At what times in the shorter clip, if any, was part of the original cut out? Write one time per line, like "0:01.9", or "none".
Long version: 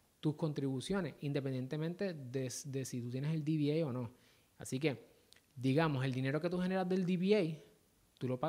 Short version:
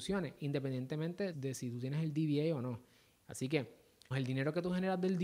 0:01.3
0:04.1